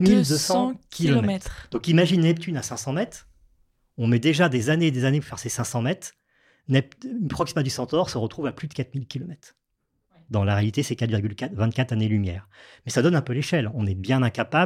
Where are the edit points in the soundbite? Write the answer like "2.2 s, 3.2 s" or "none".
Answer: none